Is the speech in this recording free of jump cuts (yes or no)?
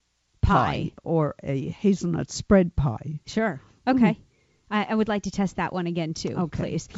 yes